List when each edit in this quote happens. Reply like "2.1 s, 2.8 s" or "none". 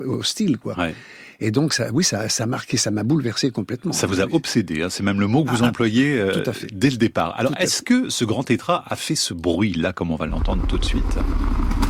none